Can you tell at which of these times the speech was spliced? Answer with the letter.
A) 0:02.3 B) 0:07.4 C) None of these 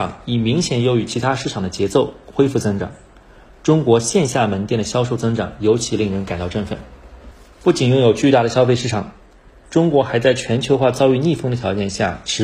C